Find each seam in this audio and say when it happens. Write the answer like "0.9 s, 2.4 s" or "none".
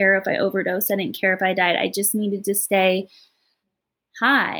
none